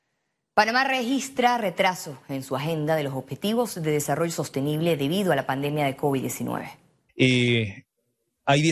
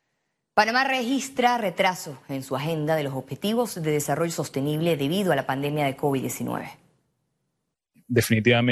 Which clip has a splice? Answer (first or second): first